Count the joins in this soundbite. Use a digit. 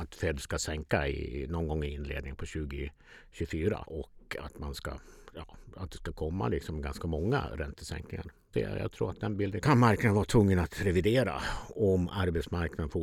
2